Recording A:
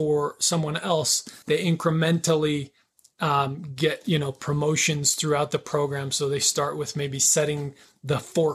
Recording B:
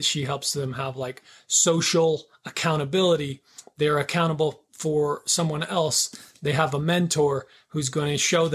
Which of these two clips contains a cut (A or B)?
A